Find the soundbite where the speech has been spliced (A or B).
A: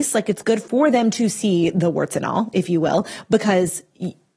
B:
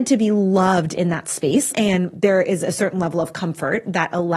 B